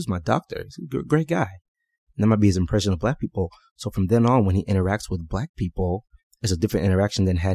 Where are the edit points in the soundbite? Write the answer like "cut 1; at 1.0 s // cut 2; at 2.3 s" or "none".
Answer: none

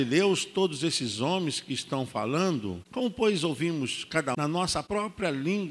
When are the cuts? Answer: cut 1; at 4.3 s

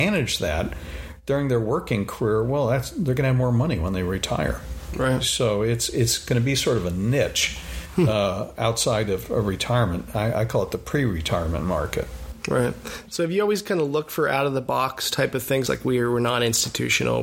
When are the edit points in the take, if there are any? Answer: cut 1; at 15.7 s

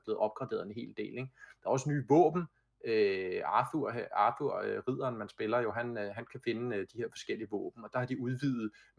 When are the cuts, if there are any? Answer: none

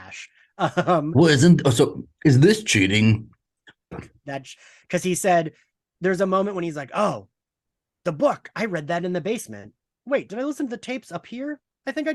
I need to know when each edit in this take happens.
cut 1; at 3.9 s

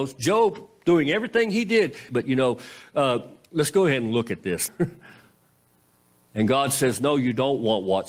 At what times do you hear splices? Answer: cut 1; at 2.1 s // cut 2; at 4.7 s

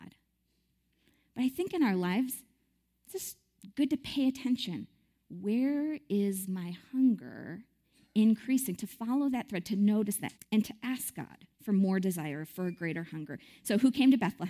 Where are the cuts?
cut 1; at 10.4 s // cut 2; at 11.5 s

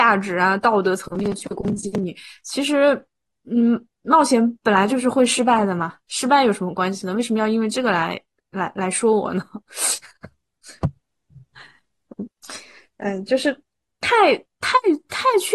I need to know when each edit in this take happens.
none

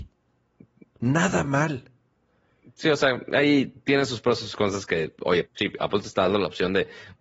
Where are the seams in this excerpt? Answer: cut 1; at 5.4 s

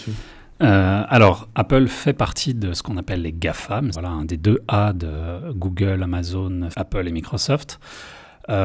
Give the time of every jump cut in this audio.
cut 1; at 3.9 s // cut 2; at 6.7 s

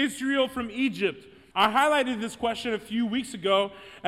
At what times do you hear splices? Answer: cut 1; at 1.5 s

